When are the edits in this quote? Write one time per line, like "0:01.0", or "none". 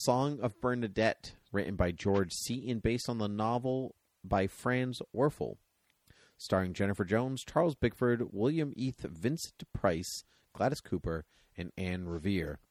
0:01.5